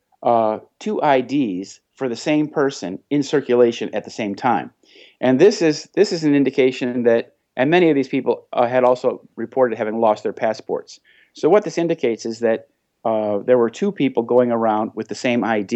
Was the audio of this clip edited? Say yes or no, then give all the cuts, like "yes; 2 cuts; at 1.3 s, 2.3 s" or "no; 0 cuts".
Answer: no; 0 cuts